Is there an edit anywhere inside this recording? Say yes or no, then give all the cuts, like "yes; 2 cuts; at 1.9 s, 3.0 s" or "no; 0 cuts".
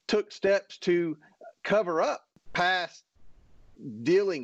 no; 0 cuts